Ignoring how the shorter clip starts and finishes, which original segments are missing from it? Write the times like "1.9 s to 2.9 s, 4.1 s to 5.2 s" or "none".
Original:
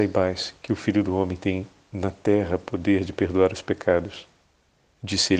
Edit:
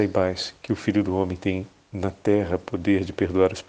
none

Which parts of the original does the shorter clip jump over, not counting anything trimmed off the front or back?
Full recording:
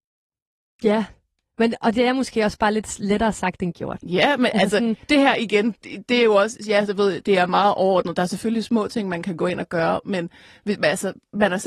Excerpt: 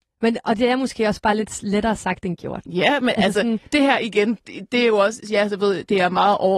none

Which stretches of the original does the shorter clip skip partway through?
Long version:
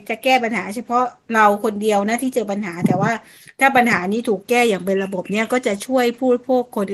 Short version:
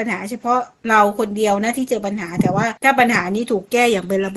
3.2 s to 3.5 s

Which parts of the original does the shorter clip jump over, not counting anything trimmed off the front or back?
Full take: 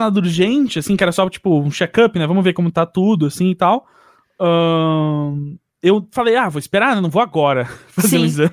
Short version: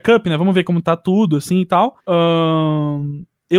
3.9 s to 4.3 s

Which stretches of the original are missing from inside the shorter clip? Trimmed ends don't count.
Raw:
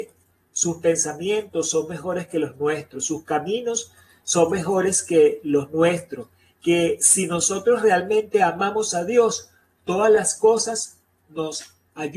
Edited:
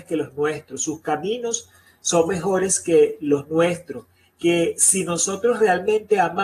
none

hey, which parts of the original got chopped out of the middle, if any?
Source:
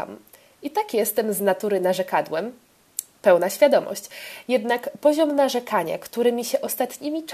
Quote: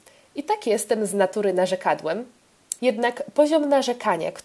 3.0 s to 4.4 s

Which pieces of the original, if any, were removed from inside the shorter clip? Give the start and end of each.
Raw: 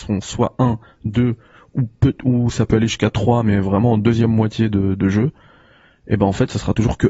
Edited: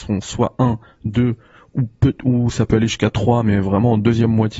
none

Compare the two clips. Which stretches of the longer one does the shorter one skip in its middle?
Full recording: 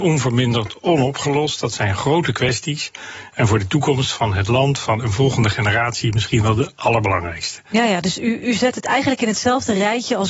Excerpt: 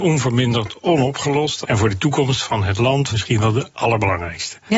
1.6 s to 3.3 s, 4.8 s to 6.1 s

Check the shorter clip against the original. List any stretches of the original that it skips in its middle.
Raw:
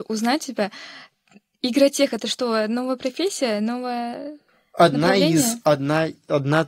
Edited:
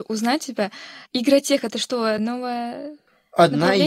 1.1 s to 1.5 s, 2.7 s to 3.6 s

